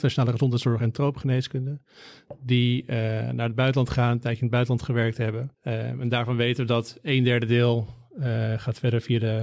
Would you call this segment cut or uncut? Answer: cut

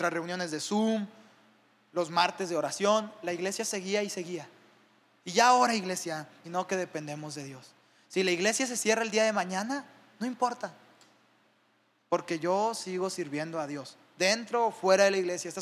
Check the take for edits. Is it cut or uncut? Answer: cut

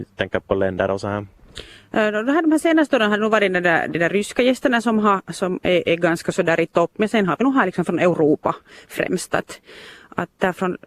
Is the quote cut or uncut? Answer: uncut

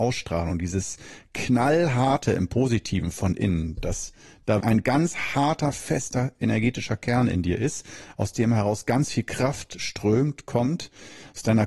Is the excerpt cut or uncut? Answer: cut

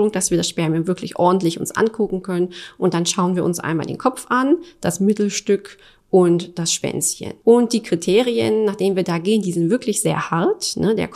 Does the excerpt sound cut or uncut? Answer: cut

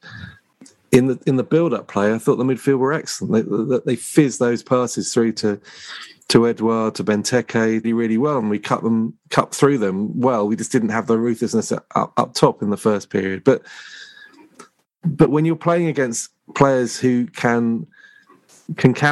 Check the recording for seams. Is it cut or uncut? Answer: cut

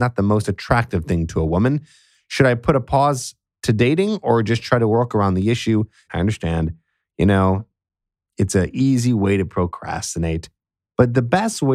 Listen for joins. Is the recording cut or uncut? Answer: cut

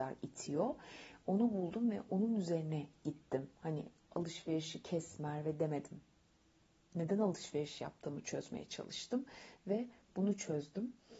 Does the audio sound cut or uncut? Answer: uncut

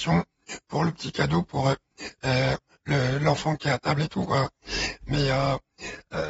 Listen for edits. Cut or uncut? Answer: uncut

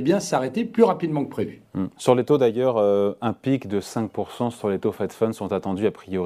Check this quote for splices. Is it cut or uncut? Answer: uncut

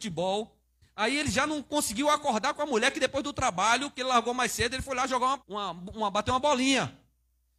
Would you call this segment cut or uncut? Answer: cut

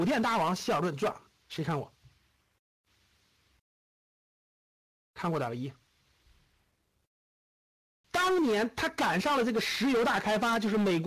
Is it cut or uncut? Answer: cut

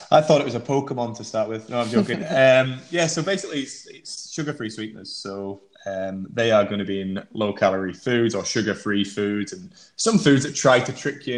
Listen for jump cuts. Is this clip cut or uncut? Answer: uncut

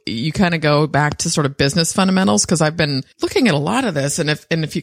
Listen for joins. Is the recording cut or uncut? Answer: cut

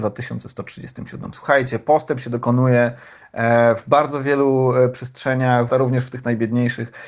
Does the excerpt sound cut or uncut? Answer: cut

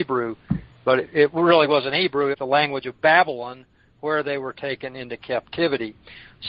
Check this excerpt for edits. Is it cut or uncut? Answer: cut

